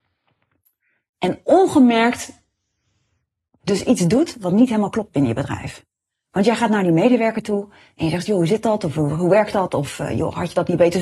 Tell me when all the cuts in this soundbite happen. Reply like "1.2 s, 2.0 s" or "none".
none